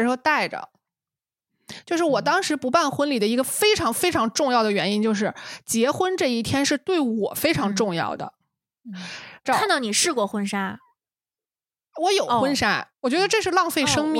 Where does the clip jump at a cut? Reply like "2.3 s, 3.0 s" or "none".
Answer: 9.4 s, 12.9 s